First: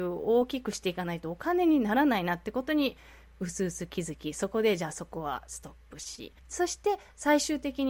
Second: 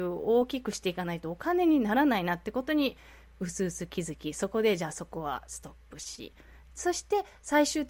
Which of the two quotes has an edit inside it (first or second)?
first